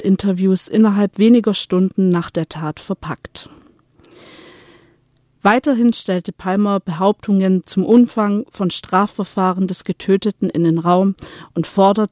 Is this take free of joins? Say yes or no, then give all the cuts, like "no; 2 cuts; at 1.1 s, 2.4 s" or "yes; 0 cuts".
no; 2 cuts; at 5.4 s, 7.6 s